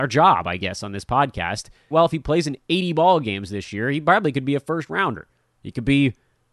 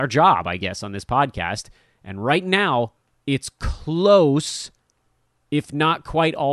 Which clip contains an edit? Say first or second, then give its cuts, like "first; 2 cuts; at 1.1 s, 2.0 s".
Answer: first; 1 cut; at 1.9 s